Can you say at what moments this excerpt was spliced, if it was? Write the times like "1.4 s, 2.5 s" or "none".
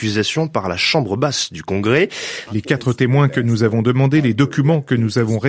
2.5 s